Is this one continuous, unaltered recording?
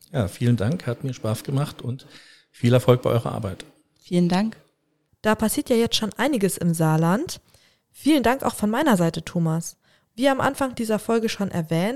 no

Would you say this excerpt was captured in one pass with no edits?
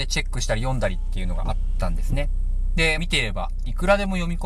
no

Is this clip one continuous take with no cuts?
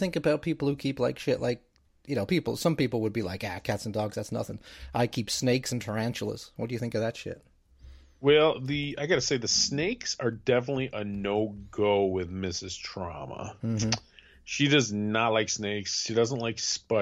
yes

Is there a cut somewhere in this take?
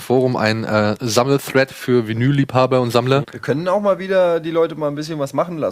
yes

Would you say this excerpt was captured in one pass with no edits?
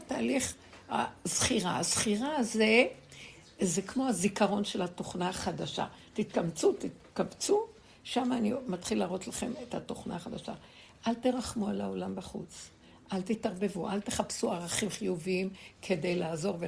yes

